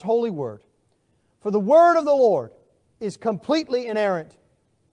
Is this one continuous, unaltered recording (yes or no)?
yes